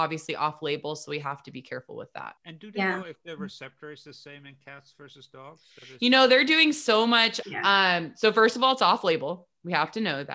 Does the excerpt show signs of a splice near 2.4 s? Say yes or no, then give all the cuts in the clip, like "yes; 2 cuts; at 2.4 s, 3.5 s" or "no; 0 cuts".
yes; 2 cuts; at 2.4 s, 7.4 s